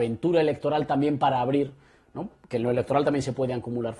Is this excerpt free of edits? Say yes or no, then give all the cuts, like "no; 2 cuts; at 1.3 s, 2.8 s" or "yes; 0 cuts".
yes; 0 cuts